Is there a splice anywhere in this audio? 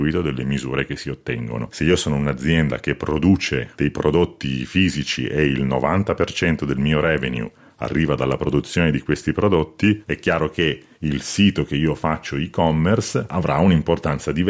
yes; 1 cut; at 1.7 s

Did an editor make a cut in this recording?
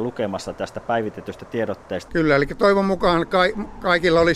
yes; 1 cut; at 2.1 s

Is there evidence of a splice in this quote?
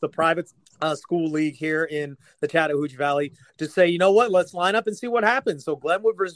no; 0 cuts

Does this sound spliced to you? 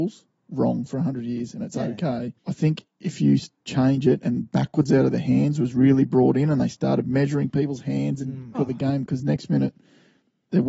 yes; 2 cuts; at 2.4 s, 8.5 s

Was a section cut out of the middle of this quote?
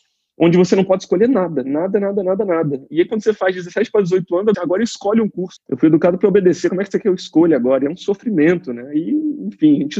yes; 2 cuts; at 4.5 s, 5.6 s

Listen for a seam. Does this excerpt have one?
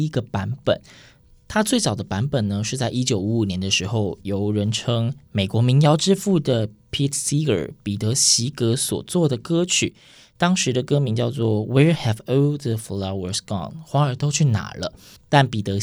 no; 0 cuts

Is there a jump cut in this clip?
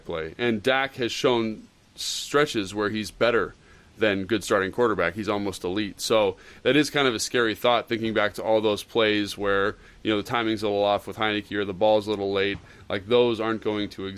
no; 0 cuts

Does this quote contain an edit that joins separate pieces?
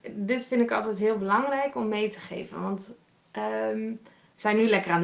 no; 0 cuts

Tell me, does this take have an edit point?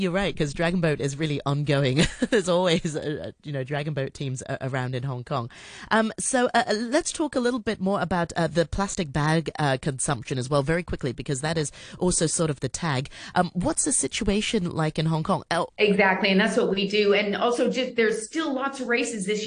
yes; 2 cuts; at 13.3 s, 15.7 s

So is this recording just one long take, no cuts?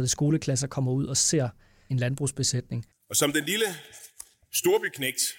yes; 0 cuts

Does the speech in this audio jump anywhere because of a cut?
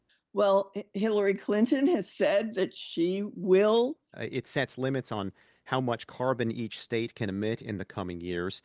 yes; 1 cut; at 4.1 s

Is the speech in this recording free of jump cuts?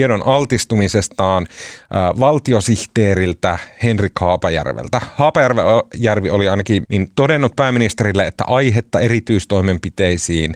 no; 1 cut; at 6.8 s

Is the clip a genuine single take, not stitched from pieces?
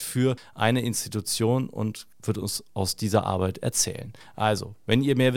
yes; 0 cuts

